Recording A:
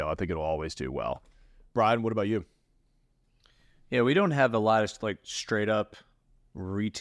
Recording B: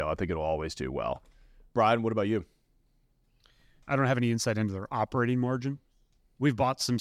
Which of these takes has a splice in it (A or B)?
B